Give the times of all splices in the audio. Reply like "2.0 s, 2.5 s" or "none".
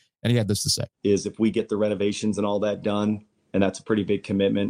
0.9 s

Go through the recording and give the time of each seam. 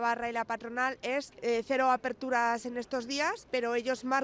none

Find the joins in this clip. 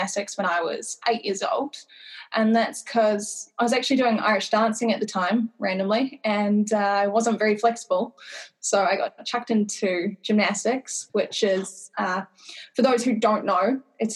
11.1 s

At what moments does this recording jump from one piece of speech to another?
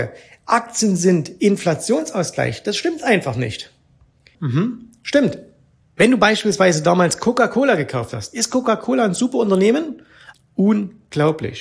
4.3 s, 10.3 s

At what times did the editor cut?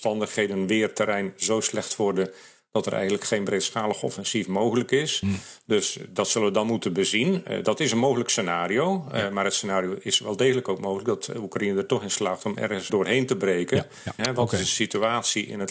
12.9 s, 14.2 s

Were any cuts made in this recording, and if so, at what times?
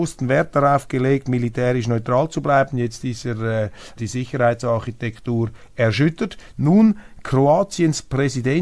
4.0 s, 6.5 s

